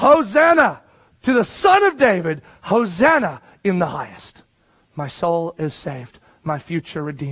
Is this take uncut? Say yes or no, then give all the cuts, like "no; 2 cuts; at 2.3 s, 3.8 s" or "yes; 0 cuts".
yes; 0 cuts